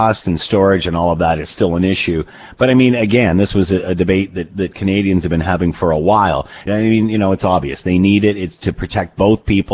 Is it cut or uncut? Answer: cut